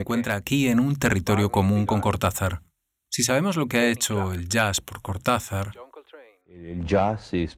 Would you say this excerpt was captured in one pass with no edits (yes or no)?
no